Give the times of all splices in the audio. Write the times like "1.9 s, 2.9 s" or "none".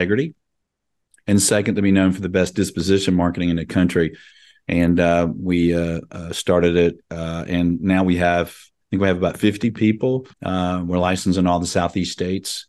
10.3 s